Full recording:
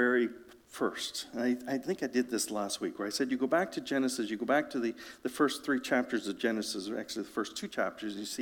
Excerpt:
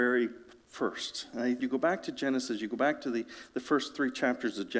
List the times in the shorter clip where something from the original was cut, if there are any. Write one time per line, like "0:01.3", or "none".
0:01.6